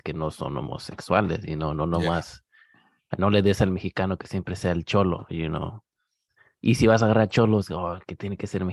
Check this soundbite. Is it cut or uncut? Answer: uncut